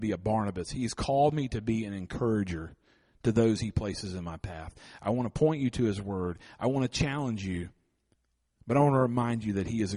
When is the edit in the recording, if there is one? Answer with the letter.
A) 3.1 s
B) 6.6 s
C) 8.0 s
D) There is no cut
B